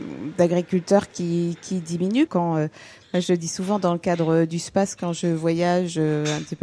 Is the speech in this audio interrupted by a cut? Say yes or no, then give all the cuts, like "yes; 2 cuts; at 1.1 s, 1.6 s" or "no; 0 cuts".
yes; 1 cut; at 2.3 s